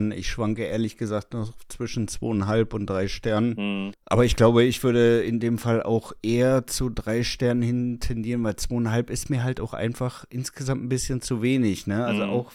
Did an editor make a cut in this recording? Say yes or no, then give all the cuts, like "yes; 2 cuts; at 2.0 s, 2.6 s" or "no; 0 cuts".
yes; 1 cut; at 3.9 s